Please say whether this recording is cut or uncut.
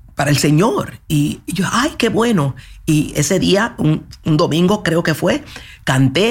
uncut